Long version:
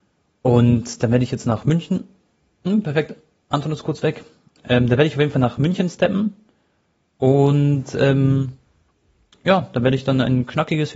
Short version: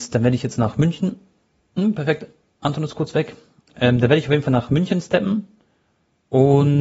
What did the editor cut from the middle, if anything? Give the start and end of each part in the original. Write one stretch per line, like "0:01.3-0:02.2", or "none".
none